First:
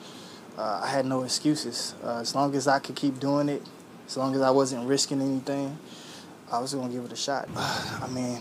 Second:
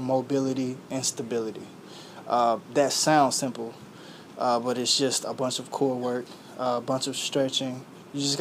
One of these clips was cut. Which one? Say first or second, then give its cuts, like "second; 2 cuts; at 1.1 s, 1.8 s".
first; 1 cut; at 7.5 s